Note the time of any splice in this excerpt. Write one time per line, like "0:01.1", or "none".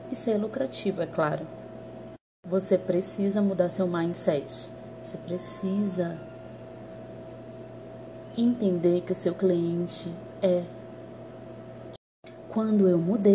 none